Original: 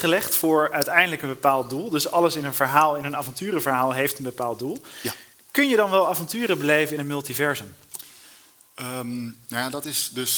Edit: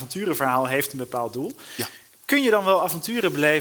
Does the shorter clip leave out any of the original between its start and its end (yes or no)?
no